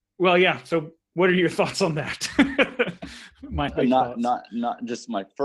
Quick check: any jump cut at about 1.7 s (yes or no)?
no